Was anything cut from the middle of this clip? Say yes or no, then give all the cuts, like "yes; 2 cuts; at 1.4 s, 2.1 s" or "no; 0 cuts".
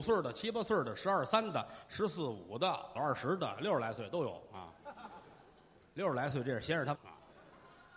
yes; 2 cuts; at 3.0 s, 6.9 s